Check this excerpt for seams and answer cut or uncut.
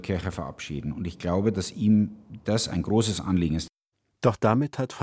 uncut